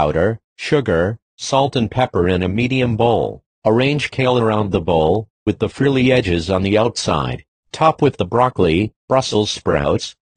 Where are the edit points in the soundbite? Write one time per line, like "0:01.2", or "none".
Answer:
0:03.6